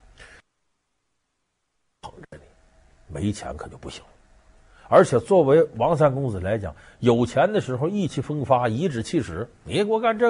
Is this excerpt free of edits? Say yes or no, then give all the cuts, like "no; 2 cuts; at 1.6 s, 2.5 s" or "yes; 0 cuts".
yes; 0 cuts